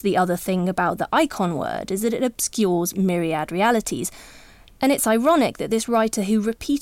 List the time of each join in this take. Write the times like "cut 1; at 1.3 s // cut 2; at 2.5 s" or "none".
none